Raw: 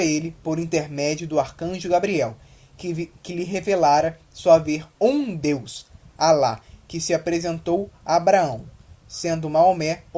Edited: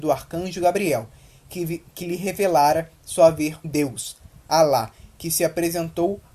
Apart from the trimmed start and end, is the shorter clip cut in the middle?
yes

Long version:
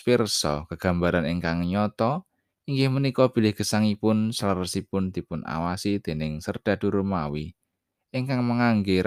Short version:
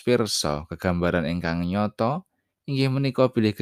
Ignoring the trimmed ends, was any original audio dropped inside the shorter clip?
no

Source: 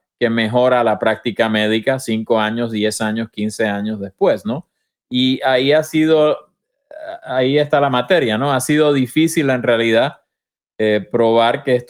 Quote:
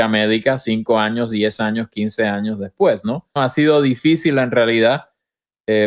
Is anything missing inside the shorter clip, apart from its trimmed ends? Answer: yes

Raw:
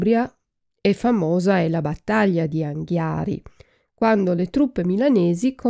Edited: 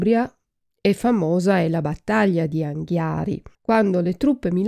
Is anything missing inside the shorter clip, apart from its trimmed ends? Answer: yes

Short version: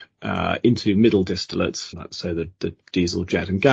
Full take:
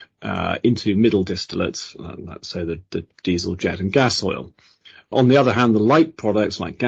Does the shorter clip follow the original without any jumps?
no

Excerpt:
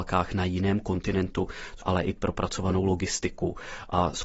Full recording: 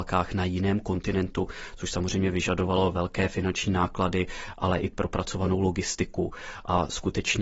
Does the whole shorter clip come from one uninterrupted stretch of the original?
no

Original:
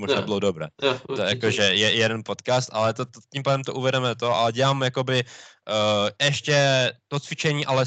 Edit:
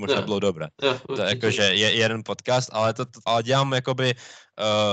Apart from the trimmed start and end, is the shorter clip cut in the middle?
yes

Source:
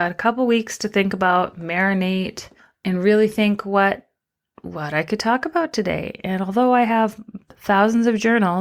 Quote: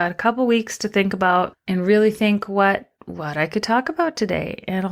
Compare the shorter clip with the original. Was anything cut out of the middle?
yes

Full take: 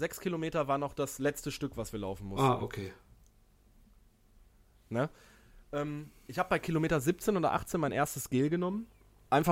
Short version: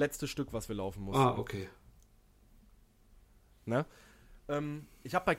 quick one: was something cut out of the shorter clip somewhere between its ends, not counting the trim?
no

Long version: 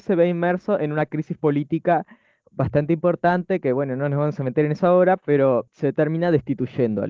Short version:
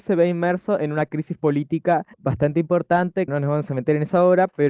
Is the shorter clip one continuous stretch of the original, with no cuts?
no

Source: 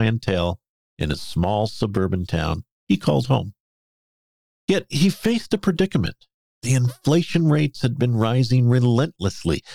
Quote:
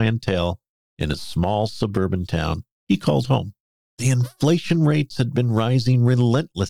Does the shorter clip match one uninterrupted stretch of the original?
no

